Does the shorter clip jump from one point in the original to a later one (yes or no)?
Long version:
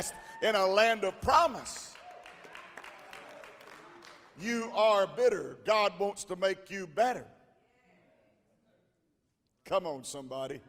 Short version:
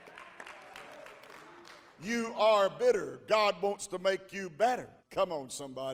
yes